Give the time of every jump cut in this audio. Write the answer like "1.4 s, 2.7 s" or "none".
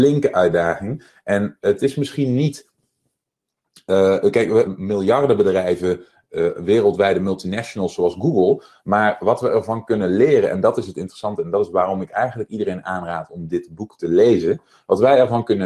4.7 s